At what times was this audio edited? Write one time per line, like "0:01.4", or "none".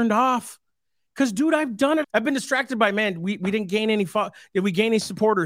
0:02.0